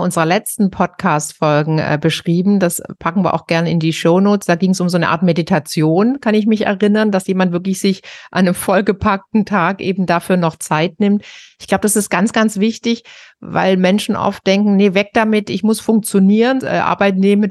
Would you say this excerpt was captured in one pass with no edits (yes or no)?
no